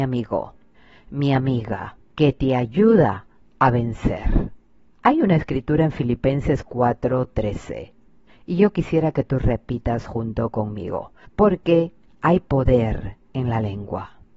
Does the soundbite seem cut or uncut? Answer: uncut